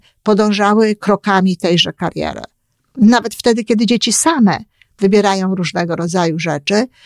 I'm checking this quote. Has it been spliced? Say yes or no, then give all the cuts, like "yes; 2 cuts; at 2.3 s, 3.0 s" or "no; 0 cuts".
no; 0 cuts